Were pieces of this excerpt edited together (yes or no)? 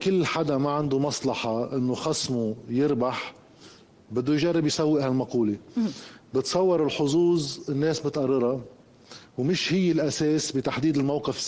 no